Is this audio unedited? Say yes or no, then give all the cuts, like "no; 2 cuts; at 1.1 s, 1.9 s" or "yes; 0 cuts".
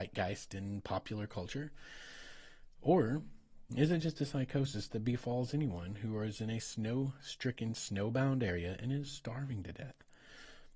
yes; 0 cuts